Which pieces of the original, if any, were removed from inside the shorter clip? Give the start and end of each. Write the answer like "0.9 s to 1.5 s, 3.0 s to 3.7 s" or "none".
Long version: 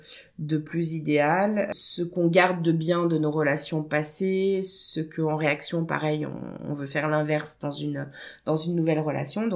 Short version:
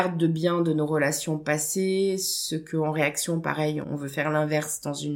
6.3 s to 6.6 s